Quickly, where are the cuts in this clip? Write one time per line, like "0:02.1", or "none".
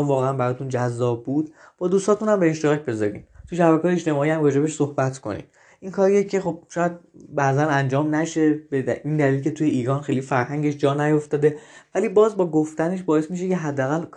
none